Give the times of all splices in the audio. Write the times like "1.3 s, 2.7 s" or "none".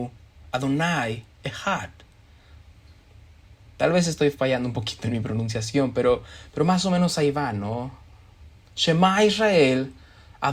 none